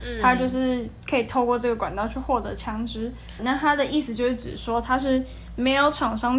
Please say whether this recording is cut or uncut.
cut